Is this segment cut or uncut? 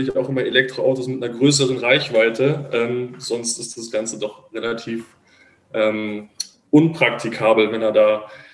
uncut